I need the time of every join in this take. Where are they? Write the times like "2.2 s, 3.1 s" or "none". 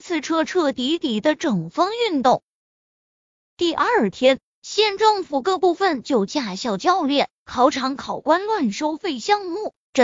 3.4 s, 4.5 s